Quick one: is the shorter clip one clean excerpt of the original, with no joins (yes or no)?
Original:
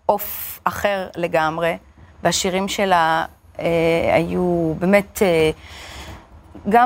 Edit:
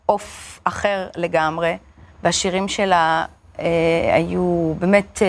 yes